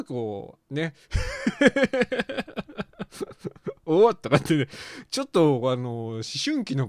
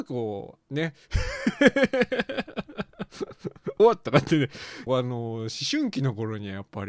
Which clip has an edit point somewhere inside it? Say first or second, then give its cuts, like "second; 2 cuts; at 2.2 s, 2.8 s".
second; 2 cuts; at 3.8 s, 4.9 s